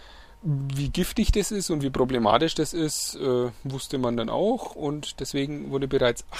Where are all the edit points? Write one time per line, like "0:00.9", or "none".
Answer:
none

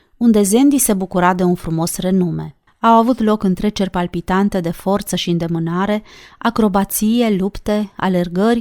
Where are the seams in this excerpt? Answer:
0:02.7

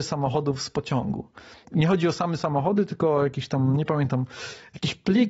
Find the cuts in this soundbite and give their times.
0:01.6

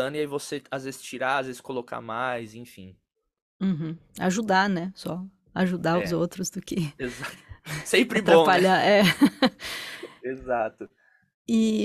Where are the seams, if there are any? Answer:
none

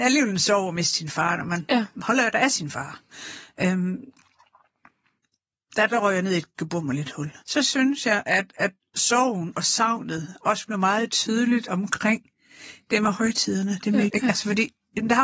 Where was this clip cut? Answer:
0:07.4
0:14.1

